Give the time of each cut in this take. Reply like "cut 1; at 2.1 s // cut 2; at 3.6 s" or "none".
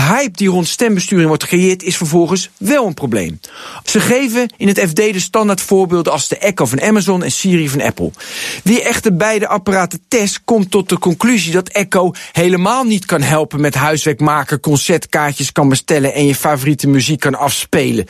cut 1; at 3.9 s